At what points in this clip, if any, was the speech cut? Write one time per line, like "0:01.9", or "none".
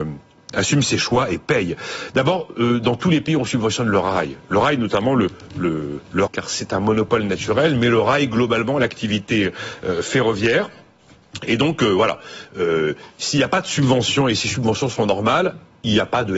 0:06.3